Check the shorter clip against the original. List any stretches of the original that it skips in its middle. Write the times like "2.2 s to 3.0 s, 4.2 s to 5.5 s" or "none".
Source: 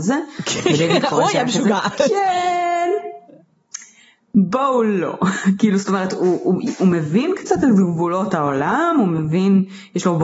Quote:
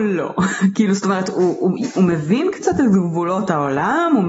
none